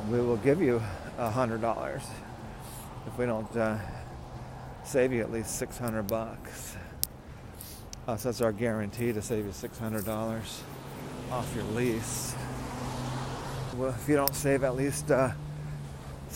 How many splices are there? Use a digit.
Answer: 1